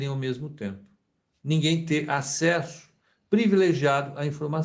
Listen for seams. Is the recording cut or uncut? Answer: uncut